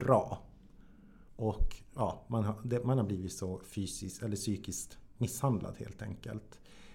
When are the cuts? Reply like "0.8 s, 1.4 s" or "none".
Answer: 1.3 s